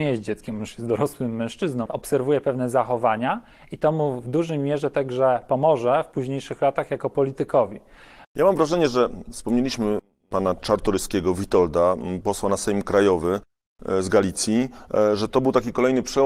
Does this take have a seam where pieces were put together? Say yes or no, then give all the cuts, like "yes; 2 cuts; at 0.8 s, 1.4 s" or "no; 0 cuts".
yes; 2 cuts; at 1.9 s, 8.2 s